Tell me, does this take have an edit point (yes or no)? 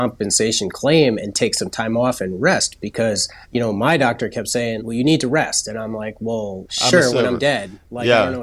yes